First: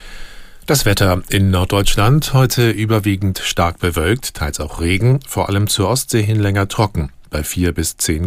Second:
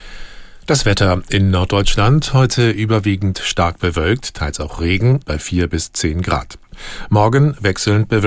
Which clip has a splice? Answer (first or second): second